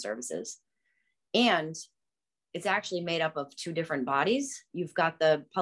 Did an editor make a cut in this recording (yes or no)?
no